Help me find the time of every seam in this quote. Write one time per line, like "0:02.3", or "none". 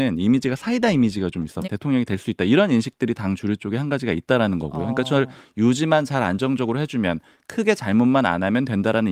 0:01.6